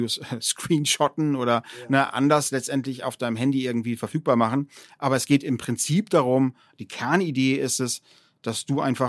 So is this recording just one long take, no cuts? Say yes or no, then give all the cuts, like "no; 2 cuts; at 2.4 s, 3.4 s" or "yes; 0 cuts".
yes; 0 cuts